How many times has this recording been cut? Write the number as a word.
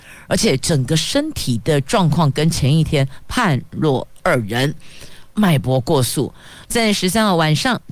two